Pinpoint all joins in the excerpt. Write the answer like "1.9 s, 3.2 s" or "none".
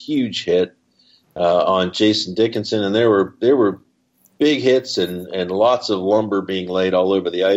none